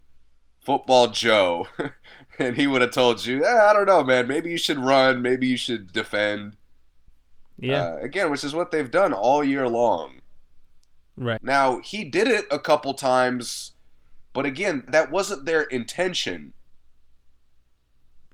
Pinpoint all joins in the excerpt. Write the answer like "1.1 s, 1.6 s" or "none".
5.9 s, 11.4 s, 14.9 s